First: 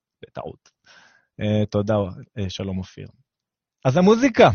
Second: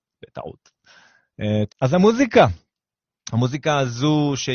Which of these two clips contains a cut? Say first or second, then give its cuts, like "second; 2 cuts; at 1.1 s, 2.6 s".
second; 1 cut; at 1.7 s